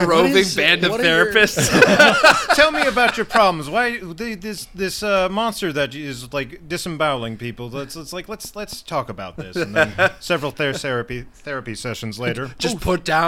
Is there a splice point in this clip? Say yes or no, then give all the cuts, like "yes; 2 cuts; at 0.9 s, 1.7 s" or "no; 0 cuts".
no; 0 cuts